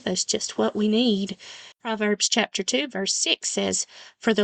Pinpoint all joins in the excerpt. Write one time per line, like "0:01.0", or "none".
0:01.7